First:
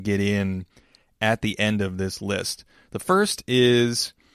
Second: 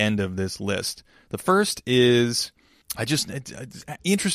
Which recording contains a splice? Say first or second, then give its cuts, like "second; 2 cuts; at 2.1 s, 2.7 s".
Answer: second; 1 cut; at 2.8 s